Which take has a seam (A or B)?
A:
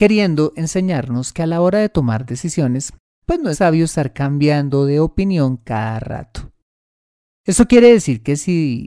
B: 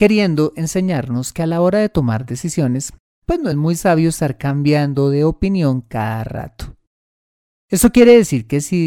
A